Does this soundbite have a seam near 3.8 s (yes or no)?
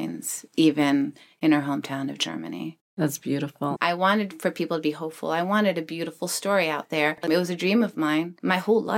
yes